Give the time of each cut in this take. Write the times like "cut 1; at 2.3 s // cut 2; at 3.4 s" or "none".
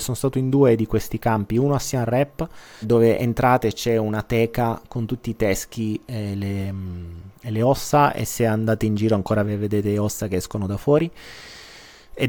cut 1; at 2.8 s // cut 2; at 9.4 s

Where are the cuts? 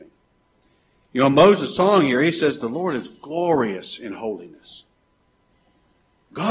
none

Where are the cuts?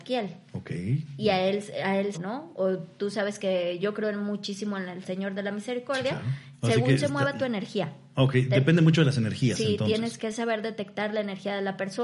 cut 1; at 2.1 s // cut 2; at 6.5 s // cut 3; at 10.2 s

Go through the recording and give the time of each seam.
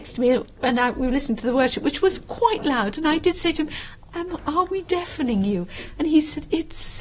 none

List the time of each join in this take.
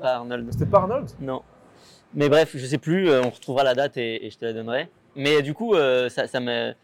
cut 1; at 4.2 s

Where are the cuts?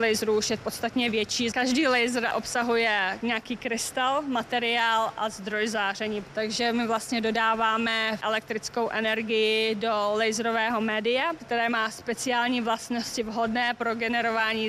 cut 1; at 1.5 s

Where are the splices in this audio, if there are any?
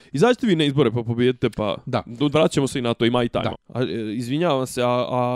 cut 1; at 3.5 s

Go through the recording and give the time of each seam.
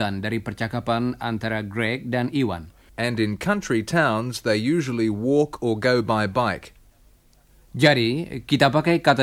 cut 1; at 2.9 s

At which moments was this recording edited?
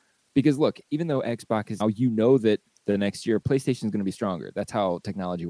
cut 1; at 1.8 s // cut 2; at 3.4 s

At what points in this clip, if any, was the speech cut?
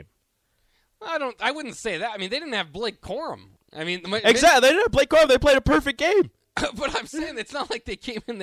none

